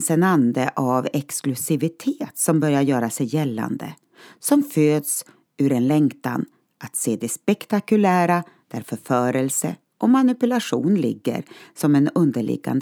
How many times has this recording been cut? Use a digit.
0